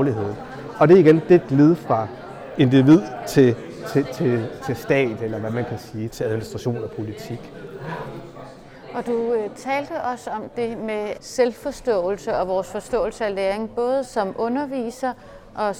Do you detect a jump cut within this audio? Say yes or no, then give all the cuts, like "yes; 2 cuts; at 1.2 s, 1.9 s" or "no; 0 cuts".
yes; 2 cuts; at 6.1 s, 11.2 s